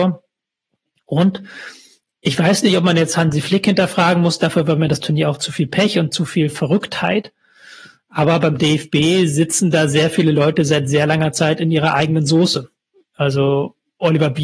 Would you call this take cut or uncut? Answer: uncut